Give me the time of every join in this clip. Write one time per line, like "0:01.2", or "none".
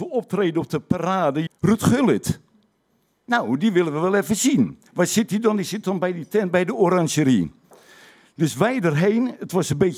0:01.5
0:04.9